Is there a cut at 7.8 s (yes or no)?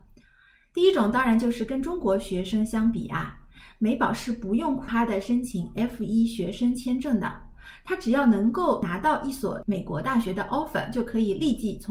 no